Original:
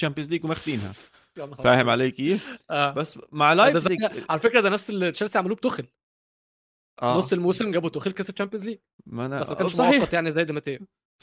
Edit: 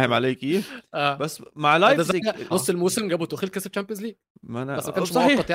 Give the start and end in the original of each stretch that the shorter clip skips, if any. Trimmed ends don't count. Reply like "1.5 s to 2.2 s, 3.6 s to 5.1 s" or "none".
4.3 s to 7.1 s